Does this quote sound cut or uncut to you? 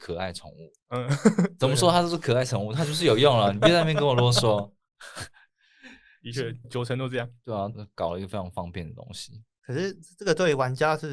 cut